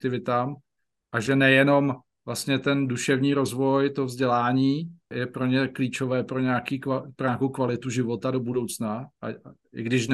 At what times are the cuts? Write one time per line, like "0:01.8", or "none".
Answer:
0:05.1